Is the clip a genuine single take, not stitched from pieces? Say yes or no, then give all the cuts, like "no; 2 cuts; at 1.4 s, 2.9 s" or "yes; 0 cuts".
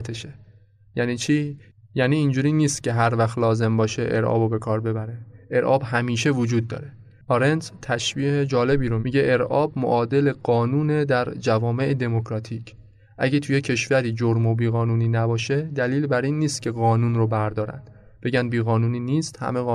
no; 1 cut; at 9.0 s